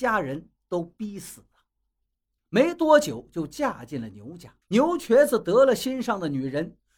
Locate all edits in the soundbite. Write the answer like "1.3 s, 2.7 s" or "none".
2.4 s, 4.6 s